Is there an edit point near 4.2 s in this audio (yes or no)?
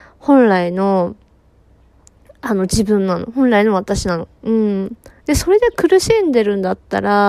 yes